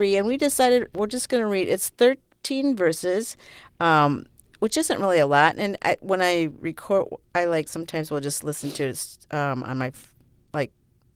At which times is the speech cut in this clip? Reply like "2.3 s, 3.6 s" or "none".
0.9 s